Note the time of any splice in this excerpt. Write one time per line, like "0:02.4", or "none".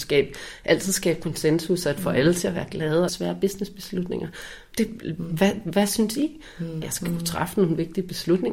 0:03.1
0:04.7
0:06.8